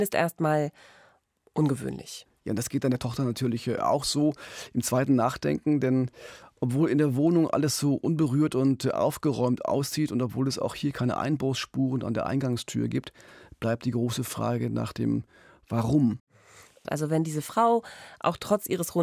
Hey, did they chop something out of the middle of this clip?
no; 0 cuts

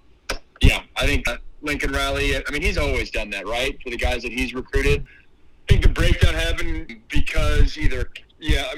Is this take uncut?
no; 1 cut; at 5.1 s

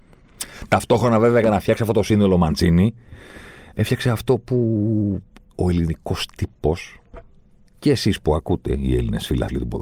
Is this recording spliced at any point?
yes; 1 cut; at 3.7 s

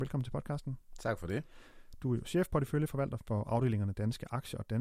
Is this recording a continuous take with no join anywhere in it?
yes; 0 cuts

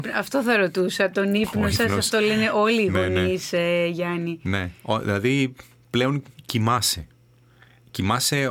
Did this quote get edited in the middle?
no; 0 cuts

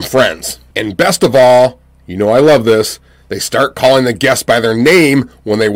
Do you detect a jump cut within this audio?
no; 0 cuts

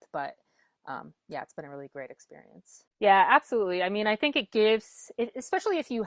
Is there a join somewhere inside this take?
yes; 1 cut; at 2.9 s

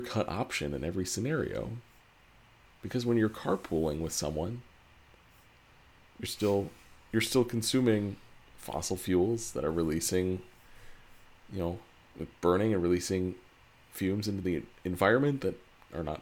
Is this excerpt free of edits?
yes; 0 cuts

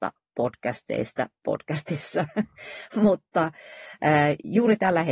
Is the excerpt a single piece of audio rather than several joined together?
yes; 0 cuts

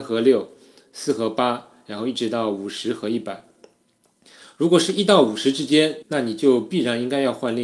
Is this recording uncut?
no; 1 cut; at 6.0 s

